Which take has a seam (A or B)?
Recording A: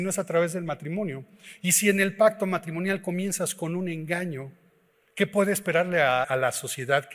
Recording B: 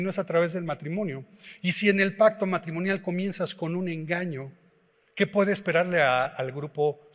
A